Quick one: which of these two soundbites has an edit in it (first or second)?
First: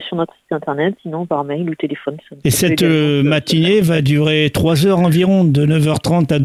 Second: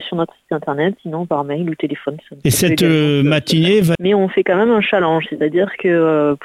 second